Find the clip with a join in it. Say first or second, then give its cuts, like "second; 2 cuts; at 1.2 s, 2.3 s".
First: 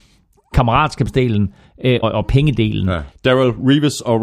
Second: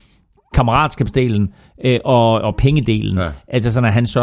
first; 2 cuts; at 2.0 s, 3.1 s